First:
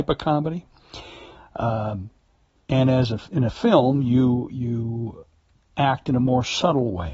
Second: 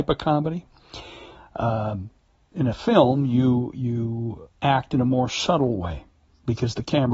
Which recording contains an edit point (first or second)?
second